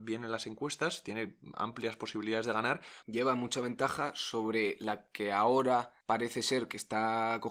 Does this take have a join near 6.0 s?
yes; 2 cuts; at 3.0 s, 6.0 s

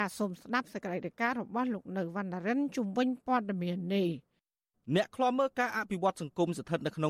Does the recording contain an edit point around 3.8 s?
no; 0 cuts

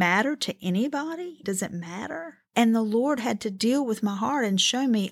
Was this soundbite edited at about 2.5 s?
yes; 2 cuts; at 1.4 s, 2.5 s

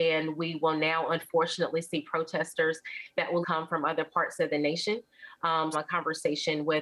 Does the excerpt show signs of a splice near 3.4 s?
yes; 2 cuts; at 3.4 s, 5.7 s

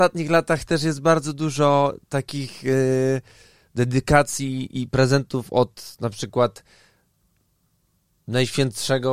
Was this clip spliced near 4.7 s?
yes; 1 cut; at 4.7 s

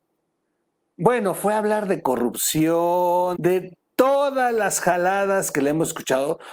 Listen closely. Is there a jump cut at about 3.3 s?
yes; 1 cut; at 3.3 s

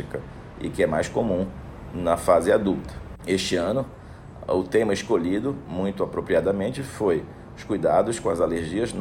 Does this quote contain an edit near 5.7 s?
no; 1 cut; at 3.2 s

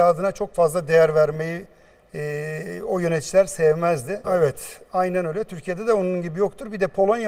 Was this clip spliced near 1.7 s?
no; 1 cut; at 4.2 s

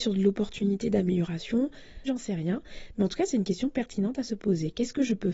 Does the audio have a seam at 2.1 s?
yes; 1 cut; at 2.1 s

